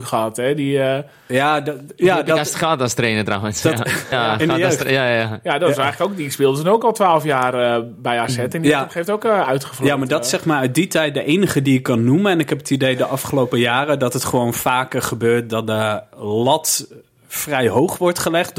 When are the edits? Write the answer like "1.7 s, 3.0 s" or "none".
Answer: 4.1 s